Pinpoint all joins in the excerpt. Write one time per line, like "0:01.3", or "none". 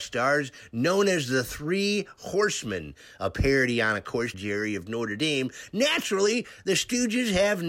0:04.3